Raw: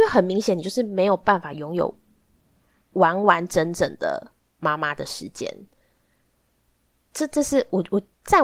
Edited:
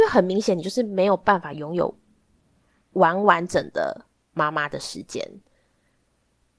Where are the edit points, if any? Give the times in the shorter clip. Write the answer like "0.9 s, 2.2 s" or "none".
3.5 s